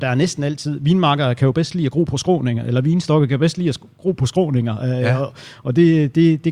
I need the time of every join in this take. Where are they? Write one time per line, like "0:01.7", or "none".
none